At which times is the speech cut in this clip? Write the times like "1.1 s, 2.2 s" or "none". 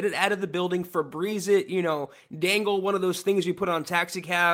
none